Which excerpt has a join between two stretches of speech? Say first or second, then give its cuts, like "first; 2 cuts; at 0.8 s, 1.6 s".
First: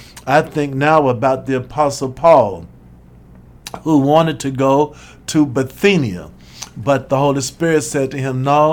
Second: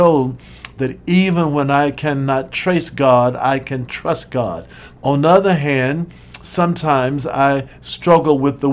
second; 1 cut; at 5.0 s